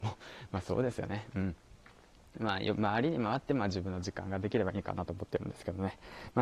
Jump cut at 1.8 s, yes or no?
no